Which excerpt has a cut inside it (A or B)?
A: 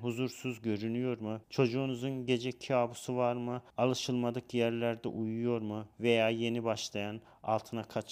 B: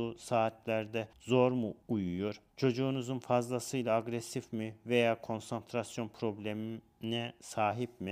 A